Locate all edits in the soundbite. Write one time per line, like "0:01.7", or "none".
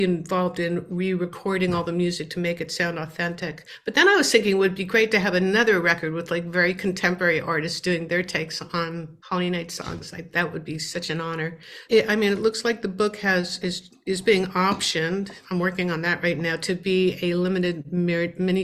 0:09.2
0:11.9
0:13.6